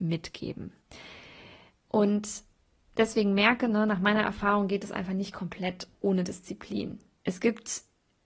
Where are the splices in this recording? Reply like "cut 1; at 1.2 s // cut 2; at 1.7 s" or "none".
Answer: cut 1; at 1.8 s // cut 2; at 7.2 s